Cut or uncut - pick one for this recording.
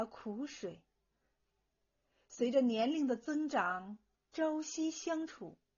uncut